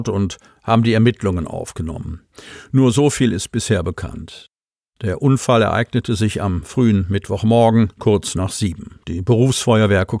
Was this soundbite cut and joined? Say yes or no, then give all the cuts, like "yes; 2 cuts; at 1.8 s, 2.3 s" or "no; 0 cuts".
yes; 2 cuts; at 8.0 s, 9.0 s